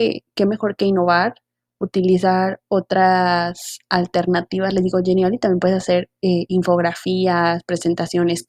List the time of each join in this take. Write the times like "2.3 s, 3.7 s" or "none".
none